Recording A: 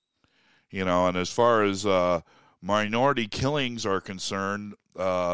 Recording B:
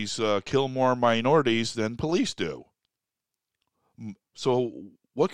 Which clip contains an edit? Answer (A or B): B